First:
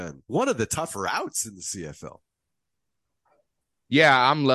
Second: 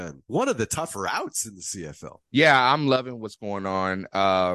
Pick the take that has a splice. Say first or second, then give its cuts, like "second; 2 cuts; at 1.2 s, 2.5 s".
second; 1 cut; at 2.2 s